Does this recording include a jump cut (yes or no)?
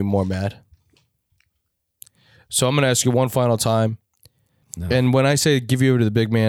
yes